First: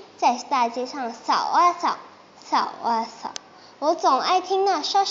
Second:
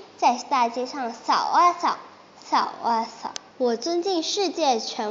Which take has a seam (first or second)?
second